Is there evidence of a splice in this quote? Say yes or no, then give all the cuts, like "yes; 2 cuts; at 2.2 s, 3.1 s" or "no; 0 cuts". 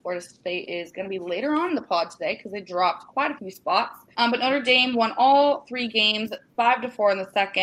yes; 2 cuts; at 4.1 s, 6.5 s